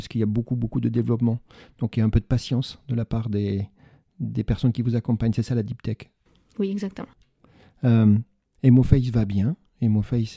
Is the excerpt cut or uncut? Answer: uncut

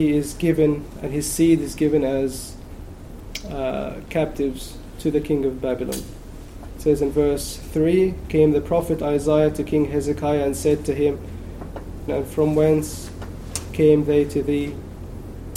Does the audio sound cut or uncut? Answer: cut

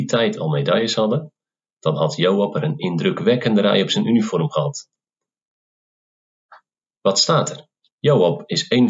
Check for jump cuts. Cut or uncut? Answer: cut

